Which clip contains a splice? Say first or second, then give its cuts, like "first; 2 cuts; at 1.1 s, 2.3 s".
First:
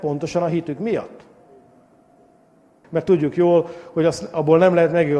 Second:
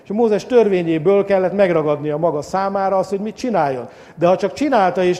first; 1 cut; at 2.8 s